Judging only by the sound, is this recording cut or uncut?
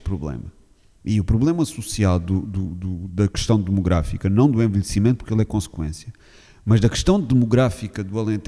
uncut